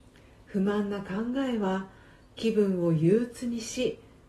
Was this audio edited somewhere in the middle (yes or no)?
no